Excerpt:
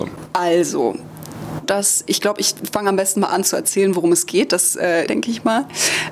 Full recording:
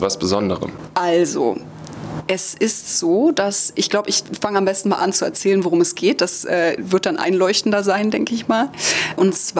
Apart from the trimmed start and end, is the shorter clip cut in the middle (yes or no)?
yes